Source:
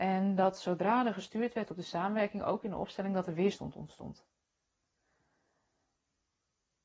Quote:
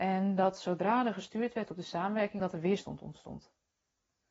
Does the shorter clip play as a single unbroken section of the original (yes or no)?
no